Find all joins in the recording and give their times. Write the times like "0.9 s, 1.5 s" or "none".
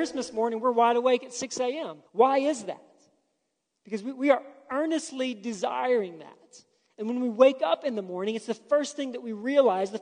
2.1 s